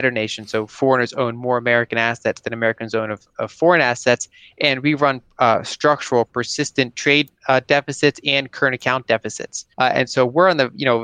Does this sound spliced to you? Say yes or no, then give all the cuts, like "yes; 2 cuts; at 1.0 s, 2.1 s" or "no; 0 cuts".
yes; 2 cuts; at 3.3 s, 9.7 s